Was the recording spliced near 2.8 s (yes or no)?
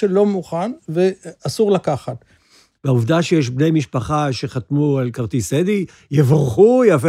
yes